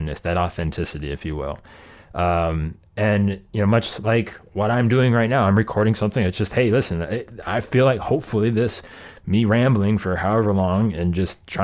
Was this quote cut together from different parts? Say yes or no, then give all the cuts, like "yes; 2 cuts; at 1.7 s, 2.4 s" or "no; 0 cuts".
no; 0 cuts